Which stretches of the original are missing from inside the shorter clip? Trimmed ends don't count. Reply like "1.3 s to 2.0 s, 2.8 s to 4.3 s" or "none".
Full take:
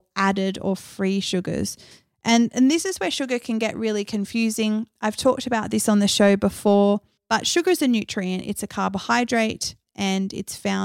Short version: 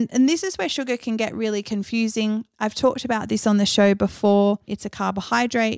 7.1 s to 8.5 s